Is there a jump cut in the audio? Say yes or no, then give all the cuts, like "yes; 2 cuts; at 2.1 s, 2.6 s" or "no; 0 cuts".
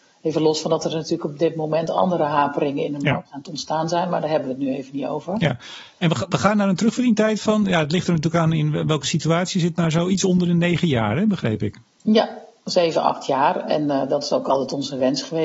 no; 0 cuts